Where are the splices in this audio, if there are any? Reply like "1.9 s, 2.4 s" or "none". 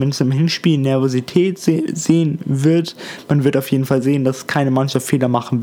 none